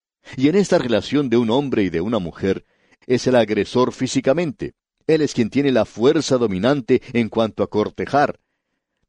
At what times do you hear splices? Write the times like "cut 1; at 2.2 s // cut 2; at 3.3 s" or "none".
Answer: cut 1; at 3.0 s